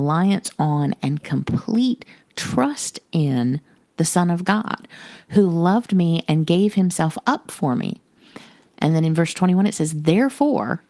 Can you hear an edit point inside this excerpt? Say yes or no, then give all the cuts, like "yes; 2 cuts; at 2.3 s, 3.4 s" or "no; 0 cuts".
no; 0 cuts